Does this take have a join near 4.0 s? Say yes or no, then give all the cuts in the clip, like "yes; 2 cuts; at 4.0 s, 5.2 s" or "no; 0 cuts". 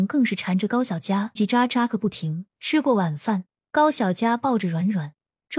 no; 2 cuts; at 1.4 s, 2.5 s